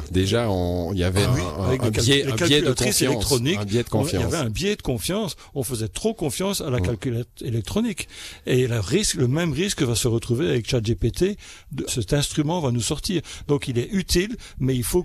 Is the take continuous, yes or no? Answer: no